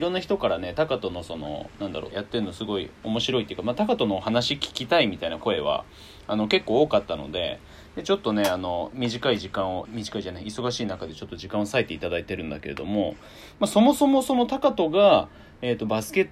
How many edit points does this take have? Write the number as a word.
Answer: two